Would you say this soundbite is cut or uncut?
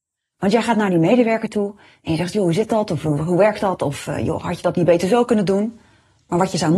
uncut